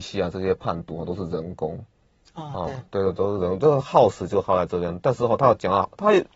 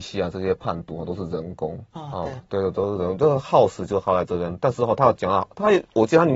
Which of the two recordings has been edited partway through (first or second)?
second